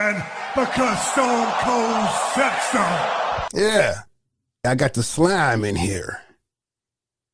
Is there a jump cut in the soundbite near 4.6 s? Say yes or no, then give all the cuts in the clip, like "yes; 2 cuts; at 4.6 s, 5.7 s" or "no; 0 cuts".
yes; 1 cut; at 4.6 s